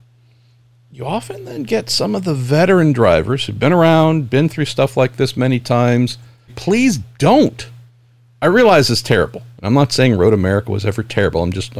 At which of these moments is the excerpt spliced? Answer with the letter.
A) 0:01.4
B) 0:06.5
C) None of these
B